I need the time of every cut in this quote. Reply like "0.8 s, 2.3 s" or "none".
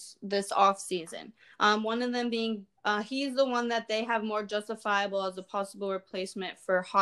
2.8 s